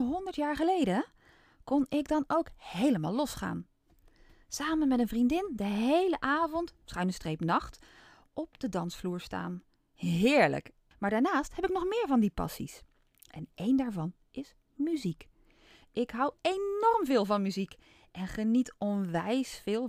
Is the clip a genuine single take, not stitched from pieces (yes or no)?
no